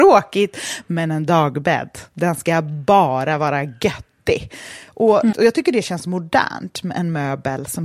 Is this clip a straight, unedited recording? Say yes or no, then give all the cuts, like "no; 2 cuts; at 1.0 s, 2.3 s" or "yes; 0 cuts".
no; 1 cut; at 5.3 s